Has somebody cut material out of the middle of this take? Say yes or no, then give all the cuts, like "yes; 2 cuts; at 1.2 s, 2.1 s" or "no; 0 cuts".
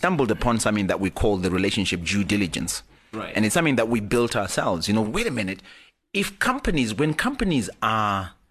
yes; 1 cut; at 5.0 s